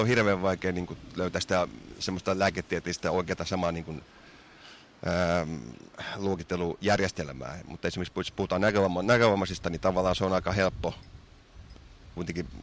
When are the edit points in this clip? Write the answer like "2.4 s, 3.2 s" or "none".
none